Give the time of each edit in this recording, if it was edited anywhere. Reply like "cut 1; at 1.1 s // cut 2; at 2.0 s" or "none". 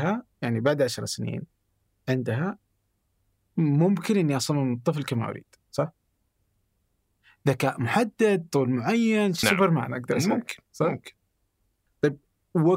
cut 1; at 9.4 s